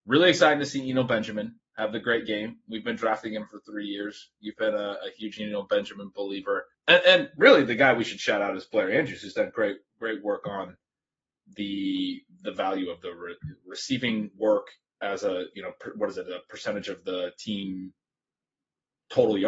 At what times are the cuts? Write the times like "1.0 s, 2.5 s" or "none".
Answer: none